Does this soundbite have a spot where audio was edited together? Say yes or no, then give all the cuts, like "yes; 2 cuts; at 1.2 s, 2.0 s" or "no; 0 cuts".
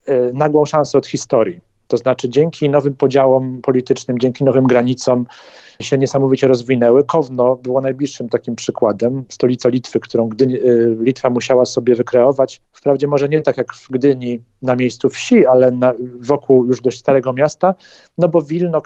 no; 0 cuts